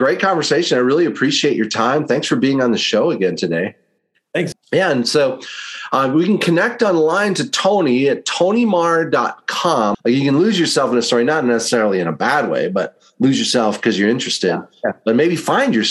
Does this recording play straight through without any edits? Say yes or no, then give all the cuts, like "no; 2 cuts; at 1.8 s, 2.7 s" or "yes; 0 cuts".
no; 2 cuts; at 4.5 s, 9.9 s